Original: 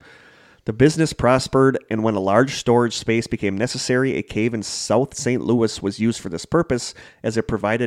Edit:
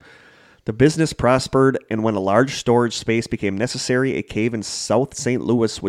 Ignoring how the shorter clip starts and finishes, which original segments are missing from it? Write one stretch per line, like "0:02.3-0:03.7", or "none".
none